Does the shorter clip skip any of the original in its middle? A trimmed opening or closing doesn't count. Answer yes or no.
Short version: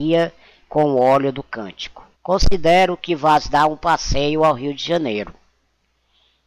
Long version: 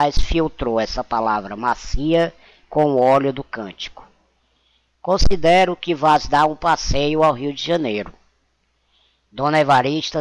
yes